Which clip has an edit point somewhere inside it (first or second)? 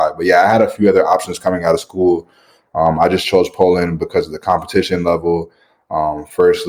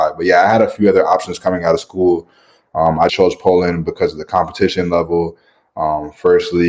second